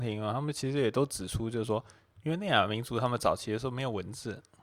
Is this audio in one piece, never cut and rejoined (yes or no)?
yes